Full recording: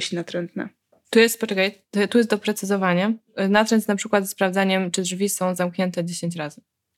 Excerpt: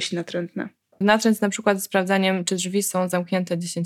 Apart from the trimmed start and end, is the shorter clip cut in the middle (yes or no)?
yes